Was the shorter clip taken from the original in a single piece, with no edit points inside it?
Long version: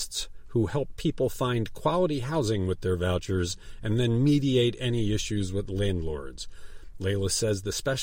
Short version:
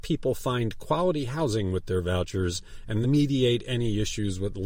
no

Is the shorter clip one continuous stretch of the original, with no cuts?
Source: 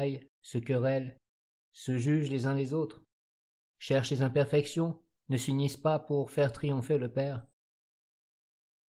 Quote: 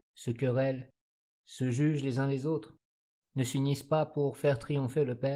no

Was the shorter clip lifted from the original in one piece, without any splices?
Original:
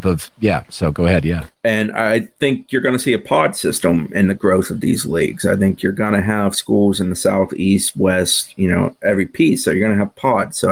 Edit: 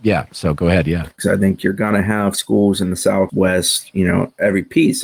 no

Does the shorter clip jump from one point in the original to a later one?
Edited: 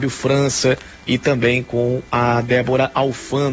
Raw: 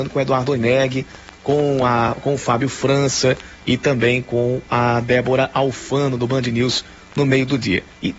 no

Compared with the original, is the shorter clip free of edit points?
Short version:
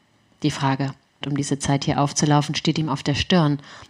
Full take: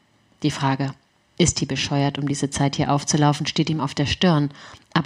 no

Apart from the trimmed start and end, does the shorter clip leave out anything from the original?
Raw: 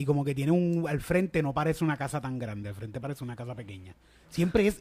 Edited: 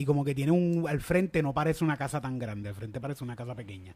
no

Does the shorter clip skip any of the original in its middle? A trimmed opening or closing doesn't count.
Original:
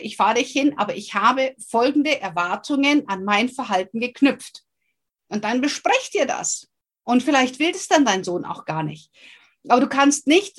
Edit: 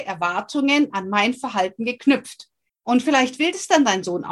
yes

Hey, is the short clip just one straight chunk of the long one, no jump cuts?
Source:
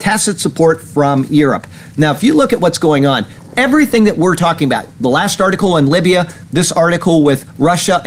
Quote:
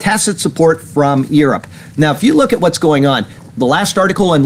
no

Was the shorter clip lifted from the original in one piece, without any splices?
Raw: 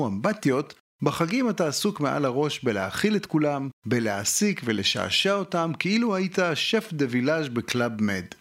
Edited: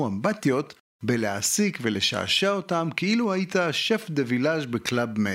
no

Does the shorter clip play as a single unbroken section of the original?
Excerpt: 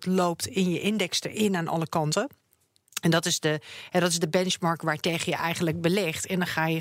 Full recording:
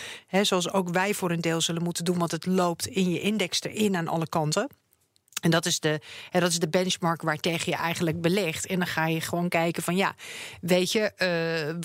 yes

